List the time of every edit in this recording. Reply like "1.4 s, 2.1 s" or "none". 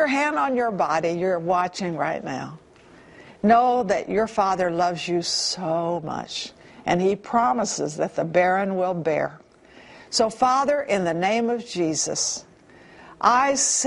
none